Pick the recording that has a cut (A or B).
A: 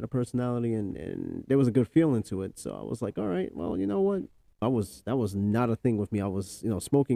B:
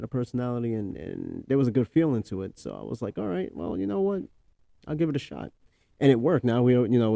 A